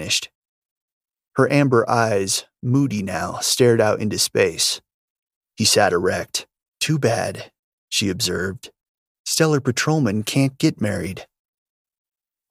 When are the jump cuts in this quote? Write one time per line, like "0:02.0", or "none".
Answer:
0:05.4
0:06.7